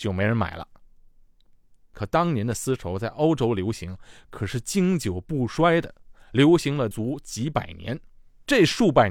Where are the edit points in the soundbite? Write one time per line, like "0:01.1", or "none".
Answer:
0:06.9